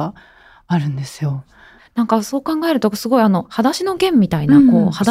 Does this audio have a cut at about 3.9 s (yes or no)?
no